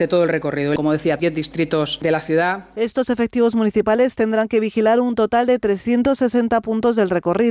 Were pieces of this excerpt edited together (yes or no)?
yes